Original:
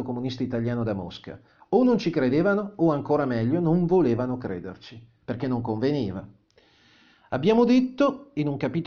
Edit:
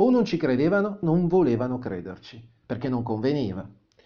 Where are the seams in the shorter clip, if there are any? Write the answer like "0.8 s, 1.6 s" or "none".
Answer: 1.0 s